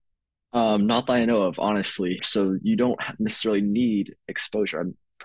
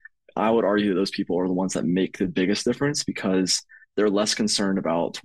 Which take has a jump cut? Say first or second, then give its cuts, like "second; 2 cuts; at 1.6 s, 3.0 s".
first; 1 cut; at 2.2 s